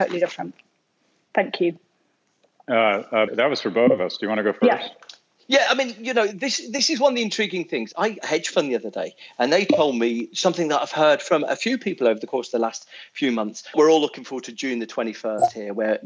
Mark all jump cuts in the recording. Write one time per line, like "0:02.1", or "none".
0:03.3
0:08.2
0:13.7